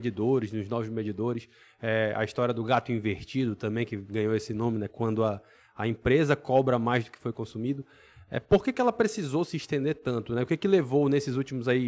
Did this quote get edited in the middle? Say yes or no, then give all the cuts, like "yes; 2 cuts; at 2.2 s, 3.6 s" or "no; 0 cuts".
no; 0 cuts